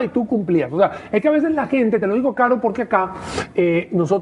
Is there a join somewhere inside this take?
no; 0 cuts

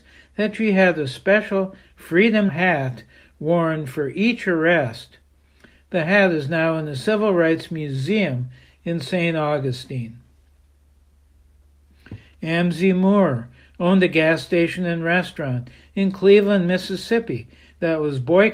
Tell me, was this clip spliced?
yes; 1 cut; at 2.5 s

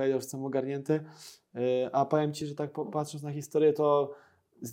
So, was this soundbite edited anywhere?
no; 0 cuts

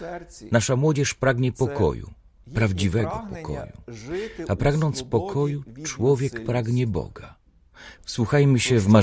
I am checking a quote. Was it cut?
yes; 1 cut; at 8.0 s

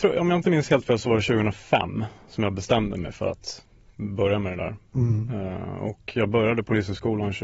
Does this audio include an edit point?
no; 0 cuts

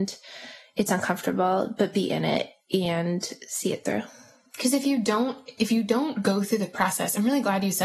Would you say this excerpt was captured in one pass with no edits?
yes; 0 cuts

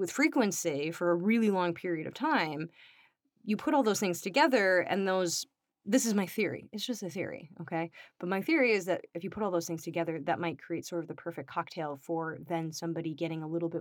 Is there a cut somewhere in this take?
no; 0 cuts

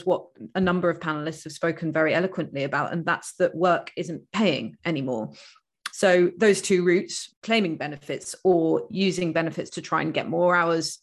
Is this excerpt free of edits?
no; 2 cuts; at 5.9 s, 7.3 s

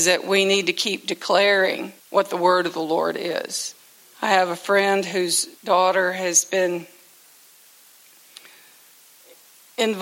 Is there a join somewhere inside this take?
yes; 3 cuts; at 2.0 s, 4.1 s, 5.6 s

